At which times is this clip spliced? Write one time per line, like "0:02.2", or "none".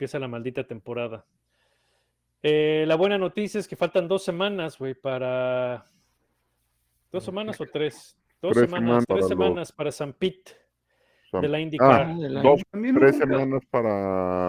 0:09.0
0:12.6